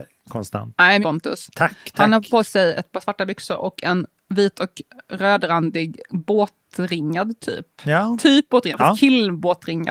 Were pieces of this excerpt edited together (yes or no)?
yes